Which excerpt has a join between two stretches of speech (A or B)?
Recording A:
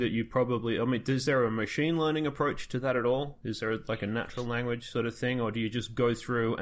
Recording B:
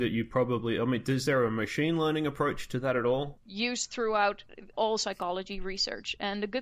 B